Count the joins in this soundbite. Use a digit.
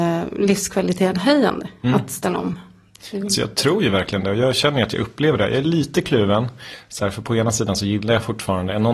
0